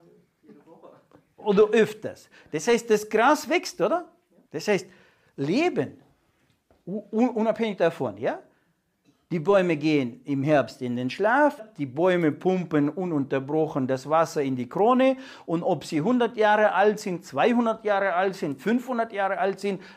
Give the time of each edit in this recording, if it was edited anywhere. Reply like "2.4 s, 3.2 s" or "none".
4.5 s, 11.6 s, 18.6 s